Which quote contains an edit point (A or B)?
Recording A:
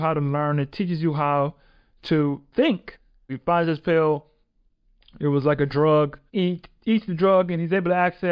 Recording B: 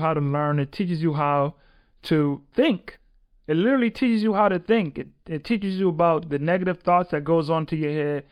A